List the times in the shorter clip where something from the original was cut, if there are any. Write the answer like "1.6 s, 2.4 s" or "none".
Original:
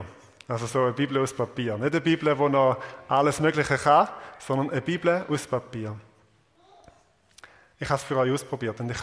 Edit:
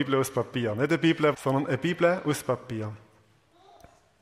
1.3 s